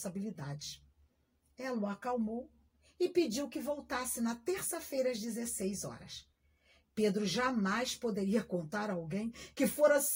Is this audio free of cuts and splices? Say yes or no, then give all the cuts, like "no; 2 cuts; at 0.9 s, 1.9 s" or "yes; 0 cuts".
yes; 0 cuts